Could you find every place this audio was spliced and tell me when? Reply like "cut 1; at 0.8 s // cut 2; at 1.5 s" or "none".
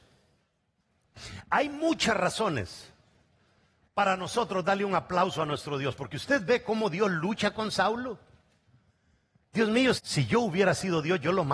cut 1; at 10.0 s